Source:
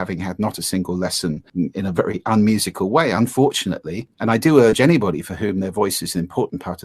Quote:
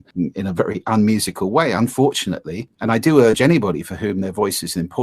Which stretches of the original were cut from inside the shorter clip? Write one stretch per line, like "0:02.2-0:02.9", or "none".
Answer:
none